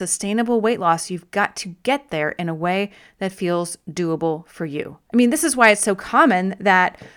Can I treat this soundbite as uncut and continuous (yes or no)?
no